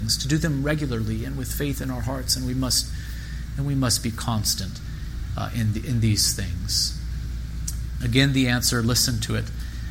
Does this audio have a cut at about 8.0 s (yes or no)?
yes